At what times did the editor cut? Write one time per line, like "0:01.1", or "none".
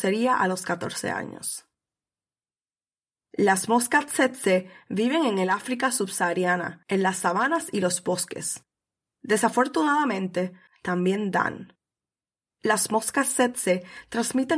0:10.7